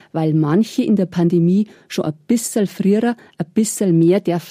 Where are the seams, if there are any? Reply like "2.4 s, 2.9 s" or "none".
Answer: none

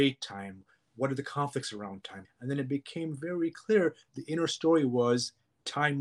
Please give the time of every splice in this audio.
2.2 s

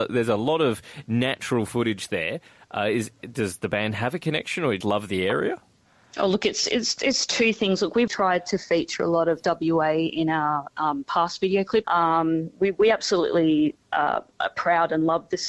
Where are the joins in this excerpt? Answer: 4.8 s, 8.1 s, 11.8 s

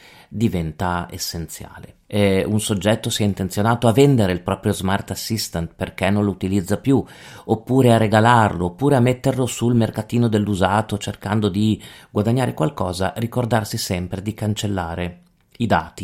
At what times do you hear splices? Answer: 2.0 s

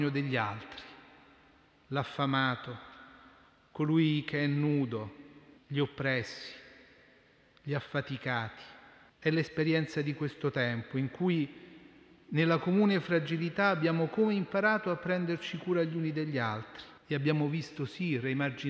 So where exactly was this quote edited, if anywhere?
5.6 s, 9.1 s, 17.0 s

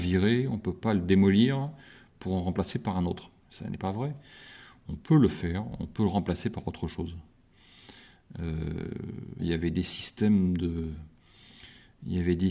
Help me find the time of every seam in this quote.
3.4 s, 9.4 s

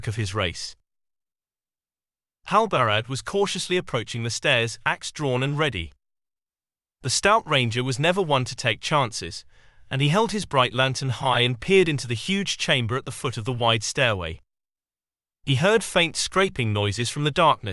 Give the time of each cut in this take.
none

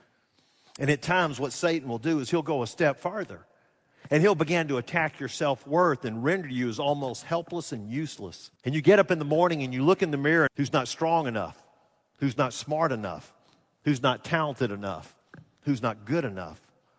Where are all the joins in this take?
8.6 s, 10.5 s

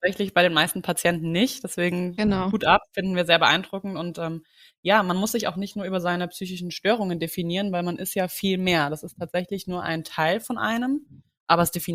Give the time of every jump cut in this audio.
none

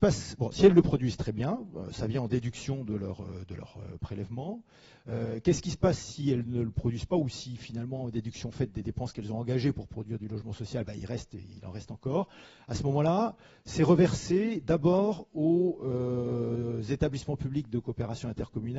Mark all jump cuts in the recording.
none

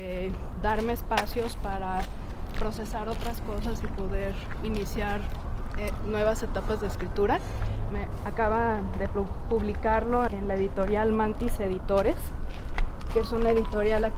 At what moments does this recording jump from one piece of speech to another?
7.9 s, 10.3 s

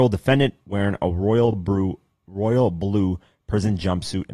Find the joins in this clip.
none

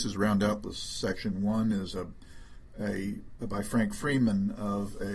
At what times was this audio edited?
3.4 s

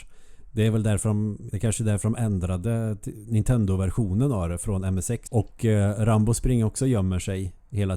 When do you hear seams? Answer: 1.5 s, 5.3 s

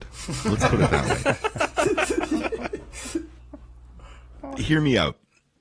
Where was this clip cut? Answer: 4.6 s

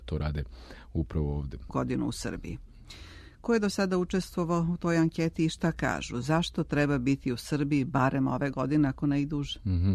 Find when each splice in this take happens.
1.7 s

